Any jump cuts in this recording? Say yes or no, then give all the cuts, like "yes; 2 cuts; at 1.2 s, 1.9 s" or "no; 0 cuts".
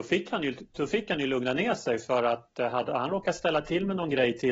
no; 0 cuts